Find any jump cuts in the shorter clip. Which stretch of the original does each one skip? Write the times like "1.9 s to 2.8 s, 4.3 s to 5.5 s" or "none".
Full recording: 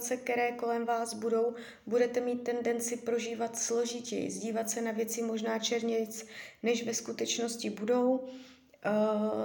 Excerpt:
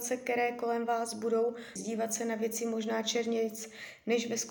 1.8 s to 4.3 s